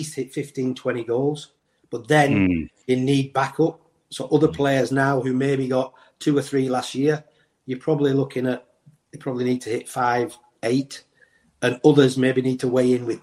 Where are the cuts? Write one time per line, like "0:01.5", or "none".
none